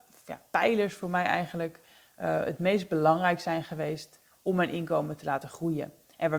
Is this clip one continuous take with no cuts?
yes; 0 cuts

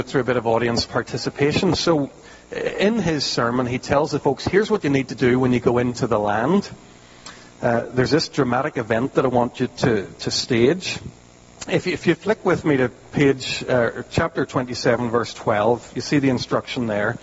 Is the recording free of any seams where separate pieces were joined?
yes; 0 cuts

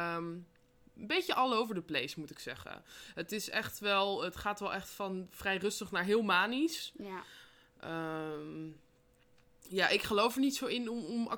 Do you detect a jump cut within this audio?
no; 0 cuts

